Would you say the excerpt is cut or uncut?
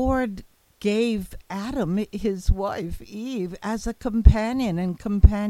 uncut